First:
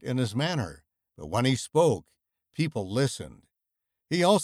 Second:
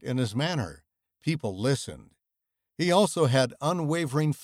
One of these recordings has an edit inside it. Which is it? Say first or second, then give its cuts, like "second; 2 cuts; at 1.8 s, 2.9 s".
second; 1 cut; at 1.0 s